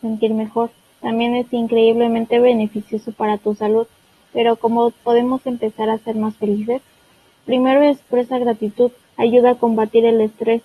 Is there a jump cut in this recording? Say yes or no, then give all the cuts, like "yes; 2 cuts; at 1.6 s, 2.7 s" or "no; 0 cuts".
yes; 2 cuts; at 7.4 s, 9.0 s